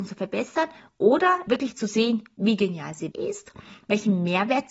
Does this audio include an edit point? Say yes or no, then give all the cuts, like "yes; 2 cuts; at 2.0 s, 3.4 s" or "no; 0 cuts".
yes; 2 cuts; at 1.5 s, 3.1 s